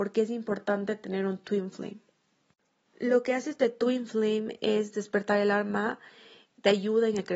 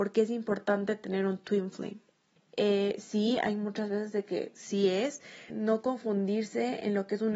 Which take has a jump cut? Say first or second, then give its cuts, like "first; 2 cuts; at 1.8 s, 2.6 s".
second; 2 cuts; at 2.4 s, 5.5 s